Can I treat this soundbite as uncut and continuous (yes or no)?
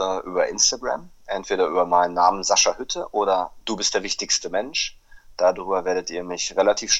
yes